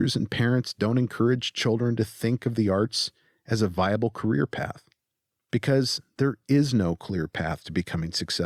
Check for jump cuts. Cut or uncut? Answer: uncut